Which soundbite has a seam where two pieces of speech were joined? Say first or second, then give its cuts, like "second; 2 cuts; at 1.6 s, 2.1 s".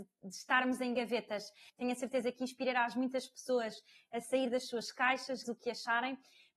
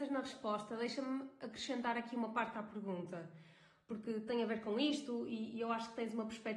first; 2 cuts; at 1.7 s, 5.4 s